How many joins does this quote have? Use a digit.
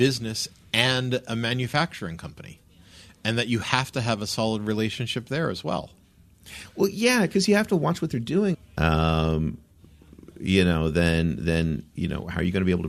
1